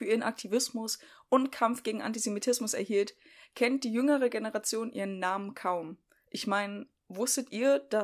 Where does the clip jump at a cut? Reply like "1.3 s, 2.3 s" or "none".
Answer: none